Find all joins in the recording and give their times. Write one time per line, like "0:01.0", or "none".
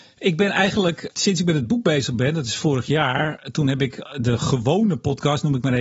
0:01.1